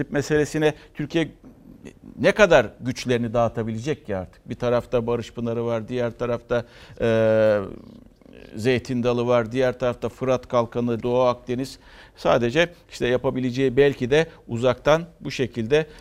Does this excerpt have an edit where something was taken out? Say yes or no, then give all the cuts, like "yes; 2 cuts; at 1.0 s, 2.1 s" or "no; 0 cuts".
yes; 1 cut; at 11.0 s